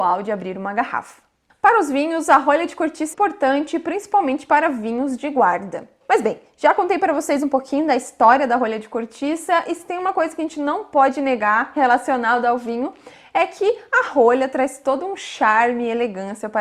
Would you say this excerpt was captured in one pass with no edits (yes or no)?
no